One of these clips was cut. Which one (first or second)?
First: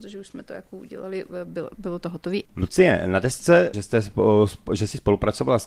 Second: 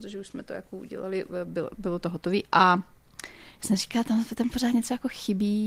first